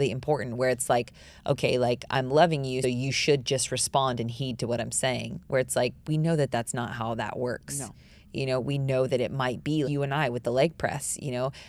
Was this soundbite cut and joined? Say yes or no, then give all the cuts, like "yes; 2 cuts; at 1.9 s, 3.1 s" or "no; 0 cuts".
yes; 2 cuts; at 2.8 s, 9.8 s